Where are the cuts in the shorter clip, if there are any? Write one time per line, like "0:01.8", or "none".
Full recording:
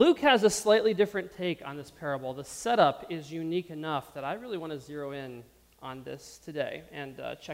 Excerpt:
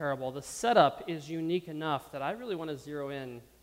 none